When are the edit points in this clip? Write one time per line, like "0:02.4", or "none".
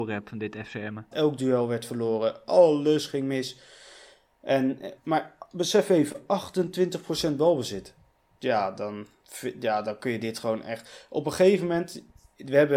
0:01.1
0:05.0
0:08.4